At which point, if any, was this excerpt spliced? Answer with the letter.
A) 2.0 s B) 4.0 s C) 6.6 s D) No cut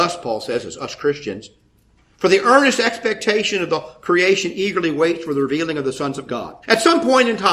C